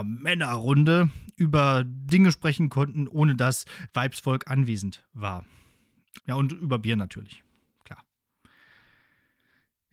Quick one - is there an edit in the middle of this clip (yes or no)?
yes